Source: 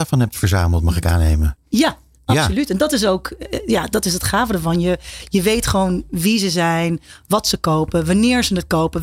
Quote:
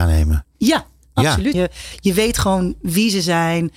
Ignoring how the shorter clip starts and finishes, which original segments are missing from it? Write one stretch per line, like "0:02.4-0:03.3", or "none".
0:02.7-0:04.8